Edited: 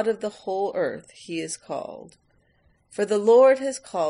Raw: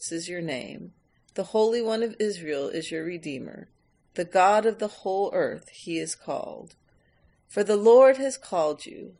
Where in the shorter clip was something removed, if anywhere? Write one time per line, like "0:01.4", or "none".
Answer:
none